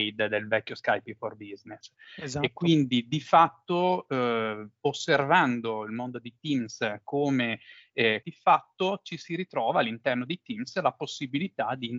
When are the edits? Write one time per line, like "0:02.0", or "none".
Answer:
0:08.2